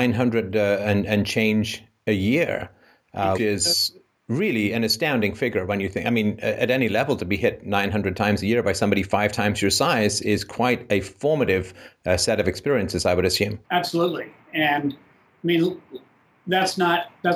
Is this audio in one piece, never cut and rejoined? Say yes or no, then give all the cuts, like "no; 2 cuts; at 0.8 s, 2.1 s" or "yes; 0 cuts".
no; 3 cuts; at 3.4 s, 10.2 s, 13.6 s